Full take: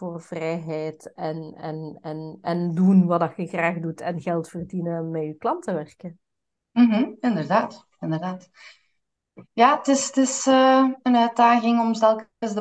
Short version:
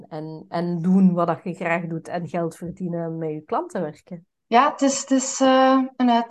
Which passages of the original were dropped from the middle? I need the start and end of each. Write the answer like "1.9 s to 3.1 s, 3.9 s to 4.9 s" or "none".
6.3 s to 9.5 s